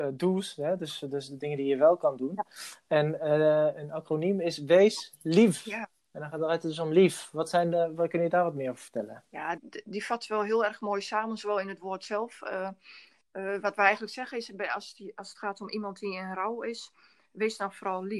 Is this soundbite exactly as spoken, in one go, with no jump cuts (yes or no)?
no